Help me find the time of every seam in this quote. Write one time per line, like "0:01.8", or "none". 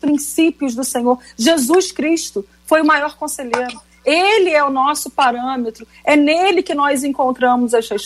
none